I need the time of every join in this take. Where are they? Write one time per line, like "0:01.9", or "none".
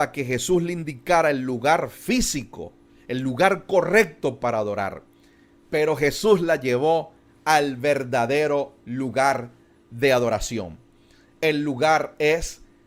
none